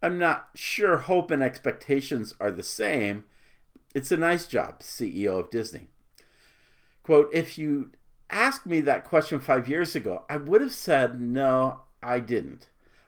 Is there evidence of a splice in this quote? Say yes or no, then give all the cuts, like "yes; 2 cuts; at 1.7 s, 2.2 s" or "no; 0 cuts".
no; 0 cuts